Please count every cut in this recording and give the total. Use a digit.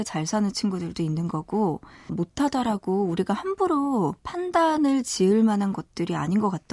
2